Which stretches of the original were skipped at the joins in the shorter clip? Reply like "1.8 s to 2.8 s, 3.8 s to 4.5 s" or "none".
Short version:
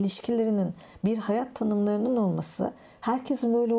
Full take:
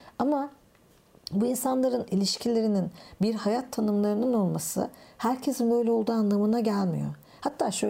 none